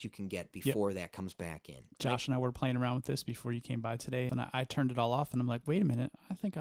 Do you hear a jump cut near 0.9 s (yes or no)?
no